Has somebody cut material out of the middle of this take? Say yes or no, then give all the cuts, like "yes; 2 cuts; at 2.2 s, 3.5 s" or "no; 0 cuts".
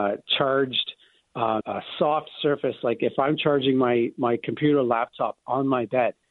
yes; 1 cut; at 1.6 s